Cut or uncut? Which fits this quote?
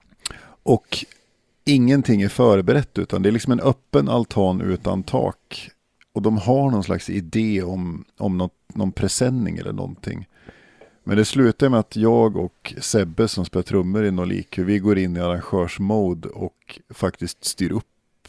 uncut